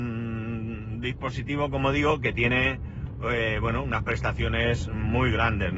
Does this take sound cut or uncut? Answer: uncut